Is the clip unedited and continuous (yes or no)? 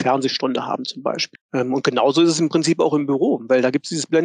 no